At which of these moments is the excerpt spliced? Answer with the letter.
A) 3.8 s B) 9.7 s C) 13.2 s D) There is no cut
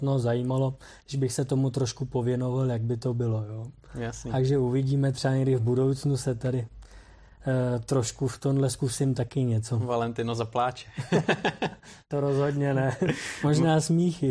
D